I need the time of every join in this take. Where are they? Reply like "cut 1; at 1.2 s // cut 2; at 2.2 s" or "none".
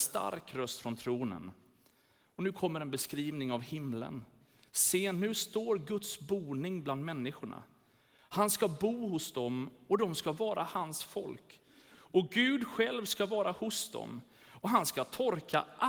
none